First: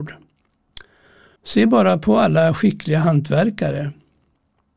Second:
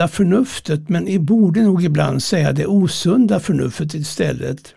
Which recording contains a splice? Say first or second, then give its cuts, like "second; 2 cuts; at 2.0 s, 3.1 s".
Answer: first; 1 cut; at 1.4 s